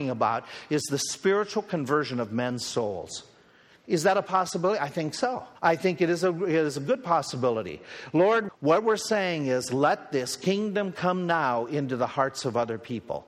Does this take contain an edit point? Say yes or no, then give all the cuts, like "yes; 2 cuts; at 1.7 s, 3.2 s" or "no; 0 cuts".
yes; 2 cuts; at 5.6 s, 8.5 s